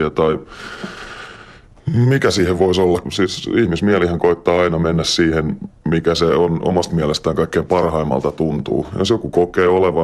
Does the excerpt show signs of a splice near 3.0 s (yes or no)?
yes